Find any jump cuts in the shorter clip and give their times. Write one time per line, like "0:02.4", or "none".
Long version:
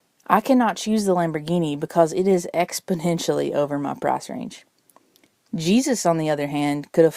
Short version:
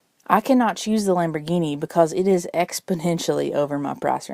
none